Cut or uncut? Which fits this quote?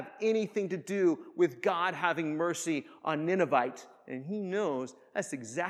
uncut